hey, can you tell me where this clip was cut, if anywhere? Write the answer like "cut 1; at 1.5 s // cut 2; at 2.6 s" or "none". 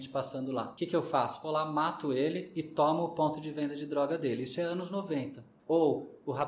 none